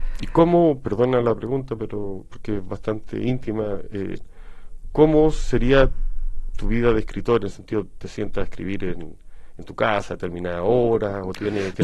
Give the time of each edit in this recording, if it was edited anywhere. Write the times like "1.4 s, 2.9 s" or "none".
none